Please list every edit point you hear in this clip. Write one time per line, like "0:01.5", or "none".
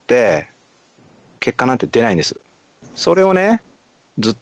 0:02.8